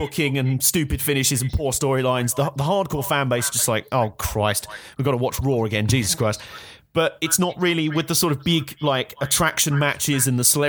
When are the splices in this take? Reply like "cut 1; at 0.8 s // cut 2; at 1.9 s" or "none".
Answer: none